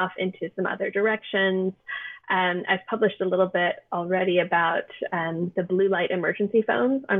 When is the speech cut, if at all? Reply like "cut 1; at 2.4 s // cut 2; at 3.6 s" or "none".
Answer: none